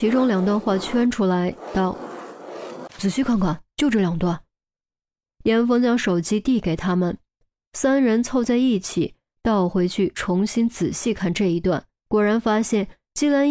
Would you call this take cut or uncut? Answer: cut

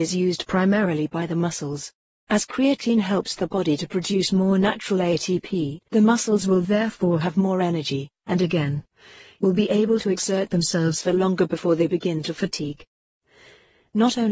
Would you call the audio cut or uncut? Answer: cut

